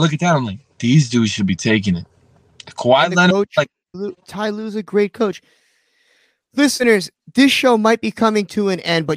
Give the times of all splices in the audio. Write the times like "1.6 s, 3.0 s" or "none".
3.9 s